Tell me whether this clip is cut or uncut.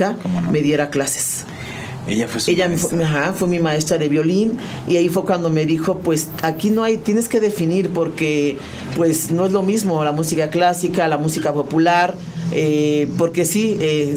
uncut